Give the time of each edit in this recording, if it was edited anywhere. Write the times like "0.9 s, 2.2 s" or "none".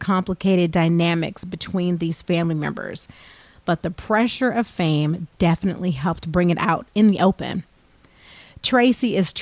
none